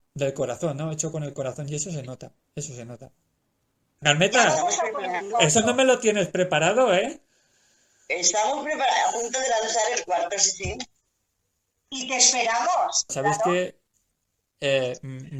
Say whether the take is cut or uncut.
cut